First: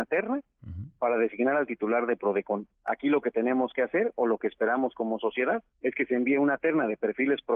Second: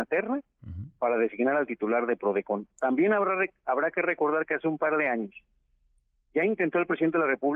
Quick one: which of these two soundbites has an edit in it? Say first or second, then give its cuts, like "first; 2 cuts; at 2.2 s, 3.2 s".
first; 2 cuts; at 2.7 s, 5.7 s